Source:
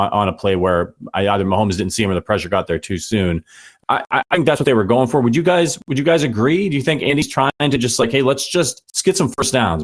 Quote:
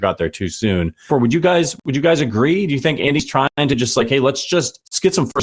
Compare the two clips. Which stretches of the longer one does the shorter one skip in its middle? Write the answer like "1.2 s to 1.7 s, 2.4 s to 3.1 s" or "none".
3.6 s to 5.1 s